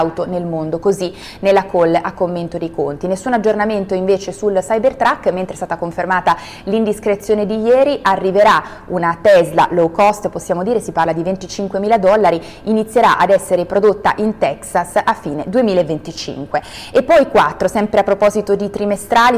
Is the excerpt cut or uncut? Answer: uncut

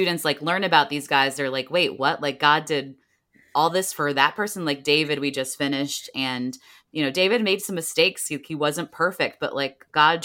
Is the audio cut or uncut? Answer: uncut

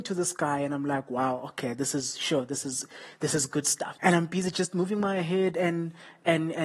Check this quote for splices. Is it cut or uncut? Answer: cut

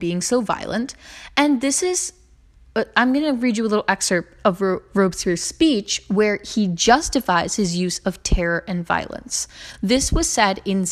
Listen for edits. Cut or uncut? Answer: uncut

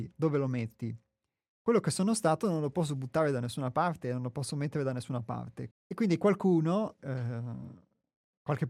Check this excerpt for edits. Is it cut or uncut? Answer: cut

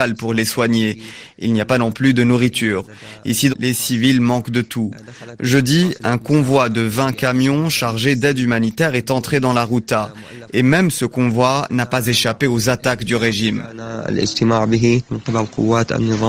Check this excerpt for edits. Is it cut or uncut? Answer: cut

